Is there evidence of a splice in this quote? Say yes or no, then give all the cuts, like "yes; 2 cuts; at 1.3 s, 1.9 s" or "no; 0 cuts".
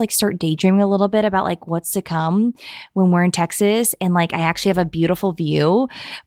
no; 0 cuts